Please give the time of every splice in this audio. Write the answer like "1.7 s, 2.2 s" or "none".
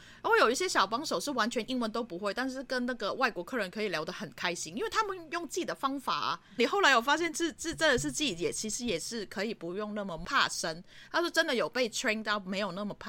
6.6 s